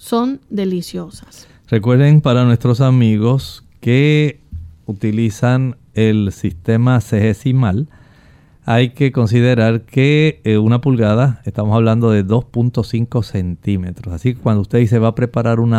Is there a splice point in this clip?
no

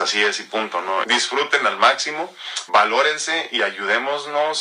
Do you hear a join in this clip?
yes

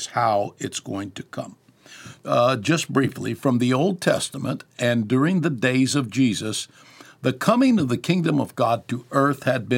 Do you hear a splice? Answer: yes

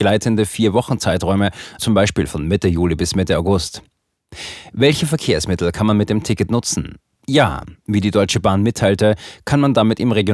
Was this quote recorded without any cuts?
no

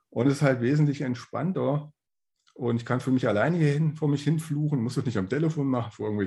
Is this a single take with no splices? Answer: yes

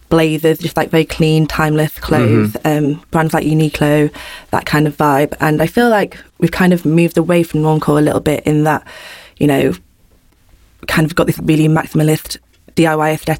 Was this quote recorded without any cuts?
no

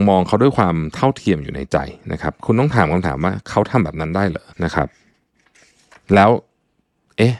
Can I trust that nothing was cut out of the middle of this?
no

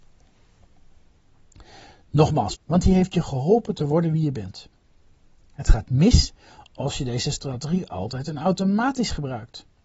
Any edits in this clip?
yes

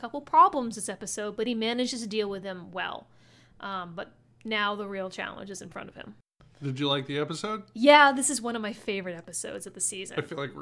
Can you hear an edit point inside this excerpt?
no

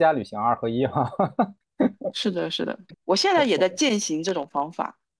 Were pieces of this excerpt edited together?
yes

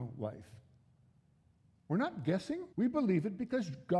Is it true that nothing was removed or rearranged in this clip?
no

